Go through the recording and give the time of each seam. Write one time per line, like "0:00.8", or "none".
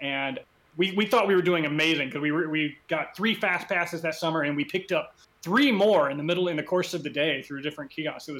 none